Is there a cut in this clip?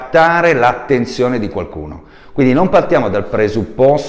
no; 0 cuts

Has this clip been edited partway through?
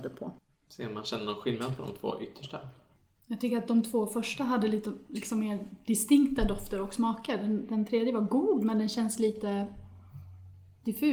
no; 0 cuts

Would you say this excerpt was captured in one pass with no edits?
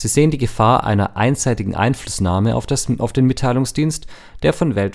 yes; 0 cuts

